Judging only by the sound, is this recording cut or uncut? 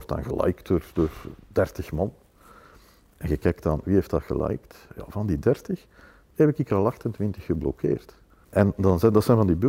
cut